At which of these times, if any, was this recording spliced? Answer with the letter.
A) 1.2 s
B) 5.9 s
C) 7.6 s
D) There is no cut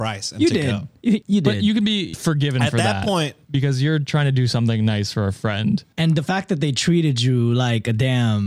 A